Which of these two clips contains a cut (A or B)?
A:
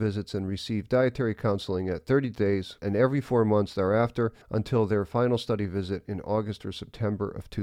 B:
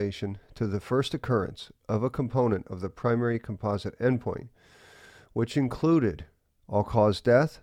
A